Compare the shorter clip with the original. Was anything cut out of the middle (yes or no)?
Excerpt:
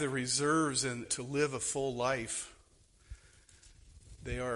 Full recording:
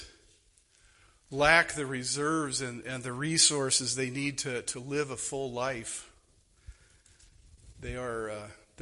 yes